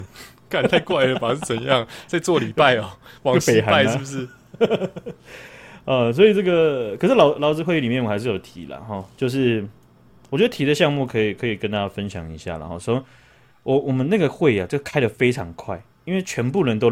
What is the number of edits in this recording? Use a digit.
0